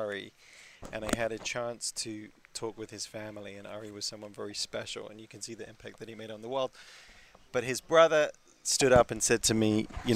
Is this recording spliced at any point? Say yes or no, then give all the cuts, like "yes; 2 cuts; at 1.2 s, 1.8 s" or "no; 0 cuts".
no; 0 cuts